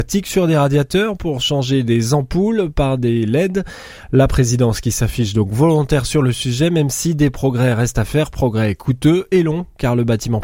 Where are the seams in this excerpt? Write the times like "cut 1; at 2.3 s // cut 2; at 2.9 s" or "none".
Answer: none